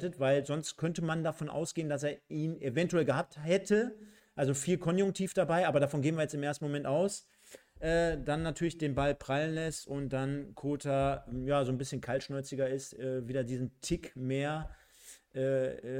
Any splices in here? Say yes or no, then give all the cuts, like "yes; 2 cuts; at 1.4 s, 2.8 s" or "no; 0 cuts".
no; 0 cuts